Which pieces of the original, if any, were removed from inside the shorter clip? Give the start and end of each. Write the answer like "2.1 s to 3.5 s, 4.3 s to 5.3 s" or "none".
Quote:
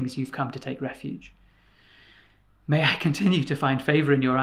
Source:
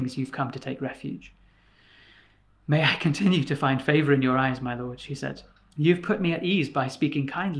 none